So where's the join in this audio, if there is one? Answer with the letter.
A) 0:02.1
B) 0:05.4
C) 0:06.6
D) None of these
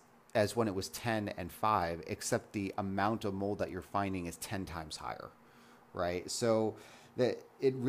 D